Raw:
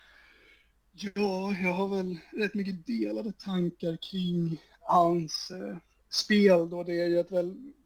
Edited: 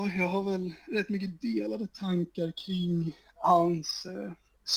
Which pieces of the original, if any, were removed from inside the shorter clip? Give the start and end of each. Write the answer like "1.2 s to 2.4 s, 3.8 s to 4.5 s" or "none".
none